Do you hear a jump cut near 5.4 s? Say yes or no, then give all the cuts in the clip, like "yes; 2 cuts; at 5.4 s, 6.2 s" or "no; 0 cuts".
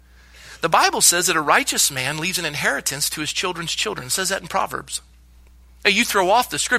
no; 0 cuts